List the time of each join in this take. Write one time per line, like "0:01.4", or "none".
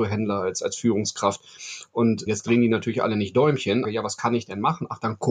0:02.3
0:03.8